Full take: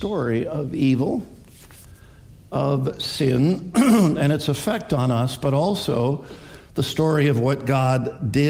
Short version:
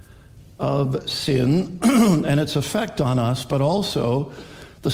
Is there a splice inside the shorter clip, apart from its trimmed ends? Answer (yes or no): no